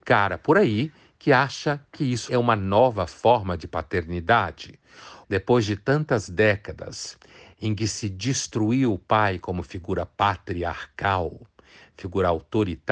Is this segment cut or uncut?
cut